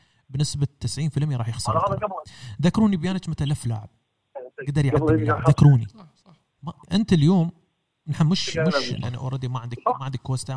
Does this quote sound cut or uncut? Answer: cut